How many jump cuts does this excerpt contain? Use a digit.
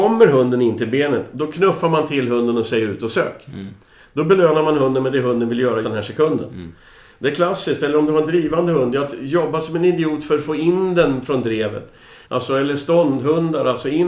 2